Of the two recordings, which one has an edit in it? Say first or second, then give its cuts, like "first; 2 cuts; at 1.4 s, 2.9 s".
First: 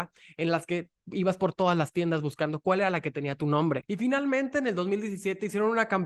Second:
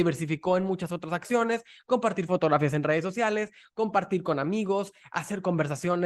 first; 1 cut; at 3.8 s